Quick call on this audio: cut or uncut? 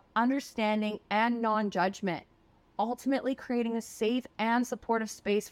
cut